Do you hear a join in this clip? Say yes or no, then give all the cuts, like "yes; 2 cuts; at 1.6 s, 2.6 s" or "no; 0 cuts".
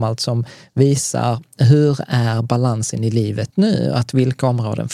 yes; 1 cut; at 3.5 s